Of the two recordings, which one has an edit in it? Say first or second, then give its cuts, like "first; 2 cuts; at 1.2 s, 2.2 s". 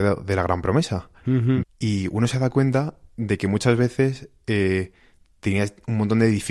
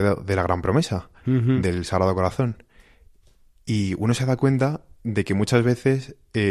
first; 1 cut; at 1.6 s